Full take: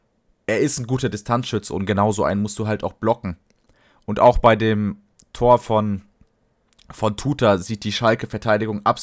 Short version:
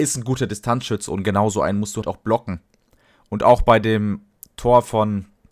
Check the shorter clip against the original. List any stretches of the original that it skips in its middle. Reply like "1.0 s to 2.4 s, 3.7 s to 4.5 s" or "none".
2.6 s to 2.8 s